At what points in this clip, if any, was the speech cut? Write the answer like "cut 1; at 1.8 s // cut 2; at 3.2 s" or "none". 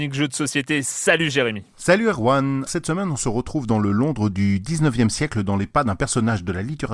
cut 1; at 2.7 s